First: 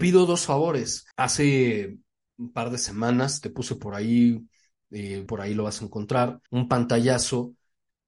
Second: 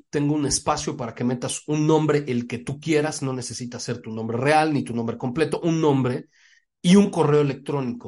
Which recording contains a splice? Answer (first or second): first